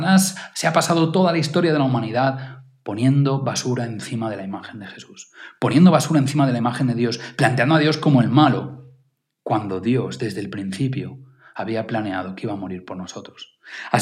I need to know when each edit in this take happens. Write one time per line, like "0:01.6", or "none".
none

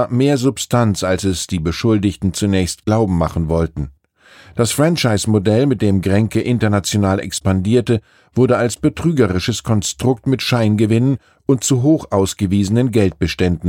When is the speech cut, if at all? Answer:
none

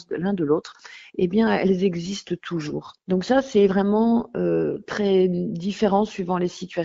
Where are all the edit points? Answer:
0:03.0

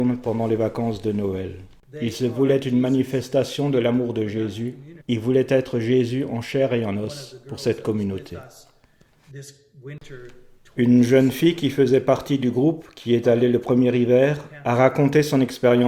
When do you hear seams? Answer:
0:01.8
0:05.0

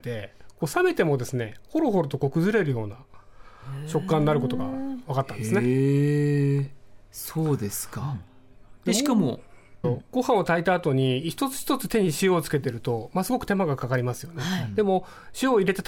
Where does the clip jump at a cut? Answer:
0:09.8

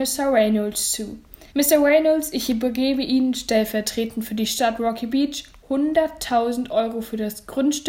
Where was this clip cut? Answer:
0:01.5

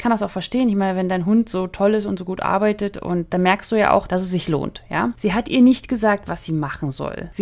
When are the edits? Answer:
0:05.1

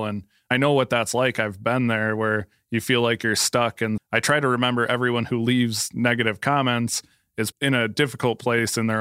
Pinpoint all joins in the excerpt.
0:04.0
0:07.5

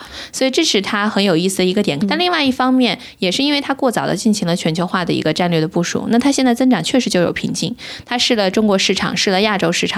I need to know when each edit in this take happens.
0:02.0

